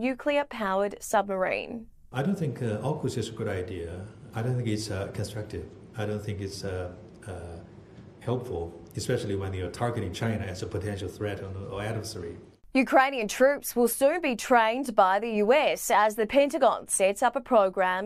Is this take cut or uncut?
uncut